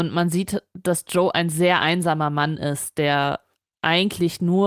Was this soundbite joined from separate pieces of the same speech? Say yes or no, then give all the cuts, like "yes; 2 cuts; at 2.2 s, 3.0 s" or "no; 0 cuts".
no; 0 cuts